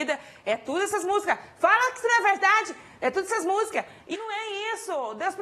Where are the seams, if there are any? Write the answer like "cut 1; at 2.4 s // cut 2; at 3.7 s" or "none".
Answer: cut 1; at 4.1 s

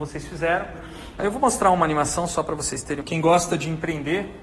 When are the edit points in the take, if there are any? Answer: cut 1; at 1.2 s

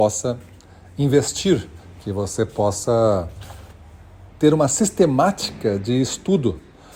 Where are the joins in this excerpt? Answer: cut 1; at 4.3 s

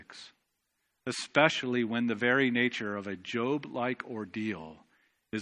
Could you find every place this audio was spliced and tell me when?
none

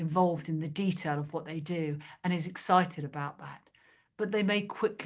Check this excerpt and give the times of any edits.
none

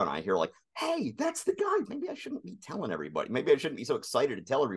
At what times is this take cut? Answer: cut 1; at 1.9 s

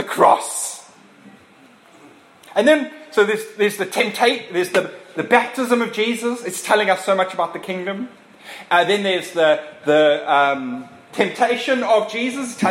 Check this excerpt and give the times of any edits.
none

